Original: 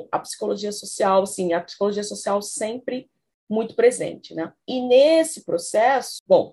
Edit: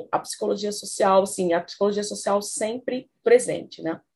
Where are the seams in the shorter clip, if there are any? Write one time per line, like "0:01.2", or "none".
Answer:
0:03.2